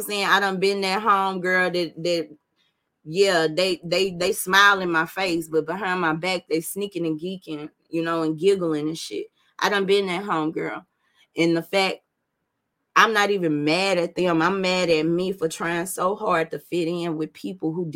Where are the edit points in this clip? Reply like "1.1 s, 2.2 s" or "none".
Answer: none